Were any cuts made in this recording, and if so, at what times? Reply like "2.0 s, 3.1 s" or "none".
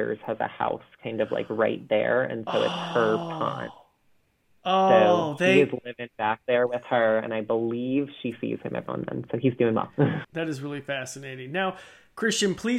8.9 s, 10.2 s